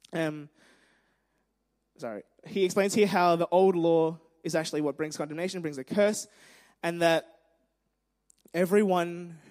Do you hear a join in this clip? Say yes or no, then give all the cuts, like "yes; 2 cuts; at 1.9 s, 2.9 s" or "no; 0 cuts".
no; 0 cuts